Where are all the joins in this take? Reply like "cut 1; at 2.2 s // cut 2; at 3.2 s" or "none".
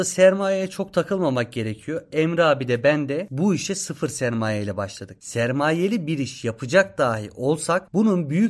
none